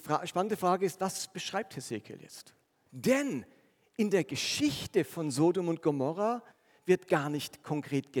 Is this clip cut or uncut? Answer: cut